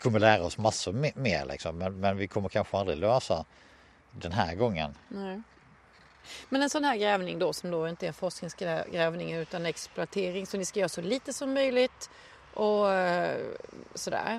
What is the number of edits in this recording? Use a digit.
0